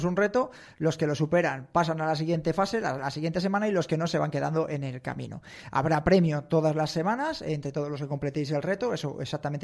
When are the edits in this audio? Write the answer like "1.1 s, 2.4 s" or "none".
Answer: none